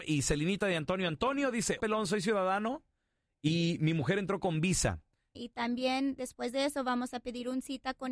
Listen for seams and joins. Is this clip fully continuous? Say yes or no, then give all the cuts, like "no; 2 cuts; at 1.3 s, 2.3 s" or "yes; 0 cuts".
no; 2 cuts; at 1.8 s, 5.4 s